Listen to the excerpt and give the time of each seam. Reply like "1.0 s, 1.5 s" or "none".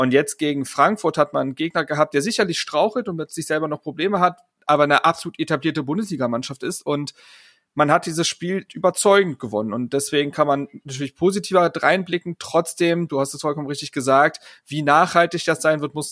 8.7 s